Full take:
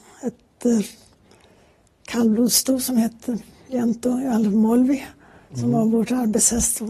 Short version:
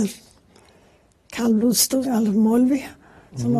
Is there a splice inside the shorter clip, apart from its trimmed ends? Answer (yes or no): yes